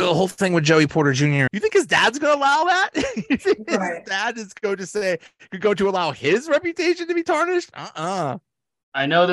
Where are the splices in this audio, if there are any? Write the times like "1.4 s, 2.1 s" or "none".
1.5 s